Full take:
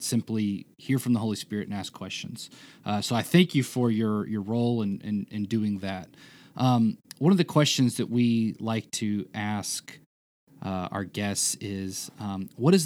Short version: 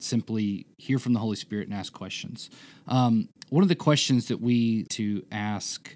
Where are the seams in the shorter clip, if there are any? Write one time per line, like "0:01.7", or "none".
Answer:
0:02.7
0:04.9